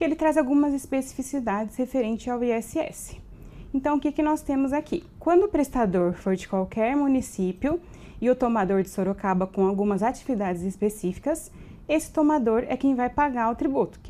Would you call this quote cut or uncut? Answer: uncut